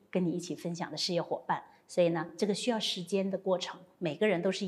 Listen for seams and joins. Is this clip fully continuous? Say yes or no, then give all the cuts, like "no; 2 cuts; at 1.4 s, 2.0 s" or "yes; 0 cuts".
yes; 0 cuts